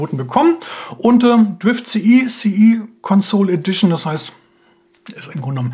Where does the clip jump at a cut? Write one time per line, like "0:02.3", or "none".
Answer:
none